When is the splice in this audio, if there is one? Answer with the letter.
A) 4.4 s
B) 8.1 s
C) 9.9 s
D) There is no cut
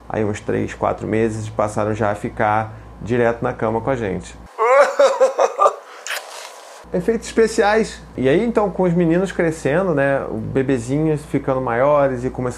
B